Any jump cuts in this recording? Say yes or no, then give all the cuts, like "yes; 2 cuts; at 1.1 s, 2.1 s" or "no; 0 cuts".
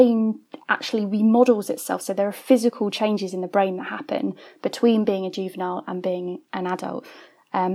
no; 0 cuts